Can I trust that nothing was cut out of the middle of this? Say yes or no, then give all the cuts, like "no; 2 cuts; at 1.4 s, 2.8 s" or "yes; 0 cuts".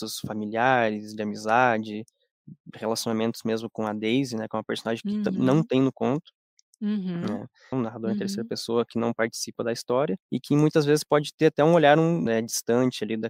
no; 3 cuts; at 7.7 s, 10.2 s, 12.3 s